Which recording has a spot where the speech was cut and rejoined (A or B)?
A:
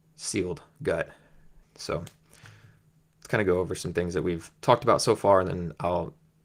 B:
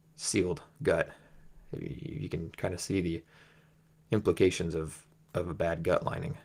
A